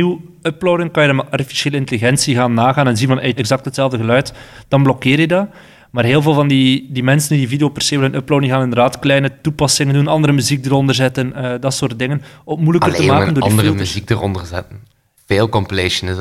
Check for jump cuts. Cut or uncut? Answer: cut